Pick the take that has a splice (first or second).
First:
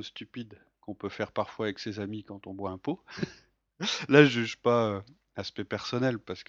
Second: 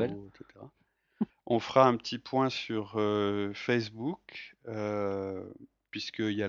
second